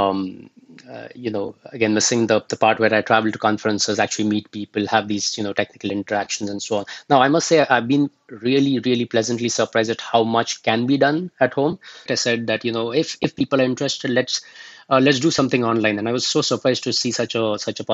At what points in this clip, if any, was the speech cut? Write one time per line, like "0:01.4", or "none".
0:12.1